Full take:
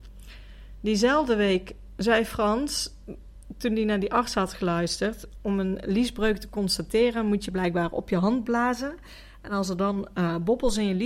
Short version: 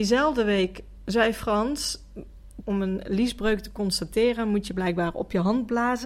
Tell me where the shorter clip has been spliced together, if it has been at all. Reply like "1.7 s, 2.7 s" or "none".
2.6 s